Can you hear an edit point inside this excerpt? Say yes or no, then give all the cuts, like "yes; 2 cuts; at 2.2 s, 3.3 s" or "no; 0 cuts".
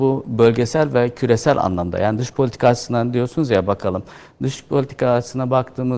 no; 0 cuts